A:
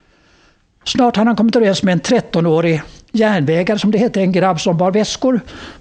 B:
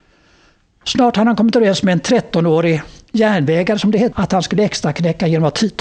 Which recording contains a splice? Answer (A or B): B